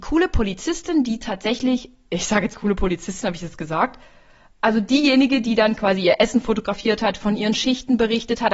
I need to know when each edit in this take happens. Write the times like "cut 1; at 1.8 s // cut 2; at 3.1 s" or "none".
cut 1; at 2.5 s